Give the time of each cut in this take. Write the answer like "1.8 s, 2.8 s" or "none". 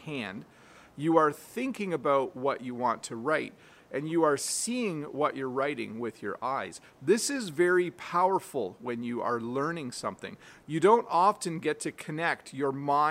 none